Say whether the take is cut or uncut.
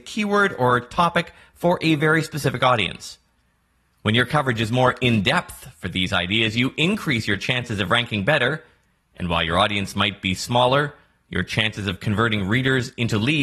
uncut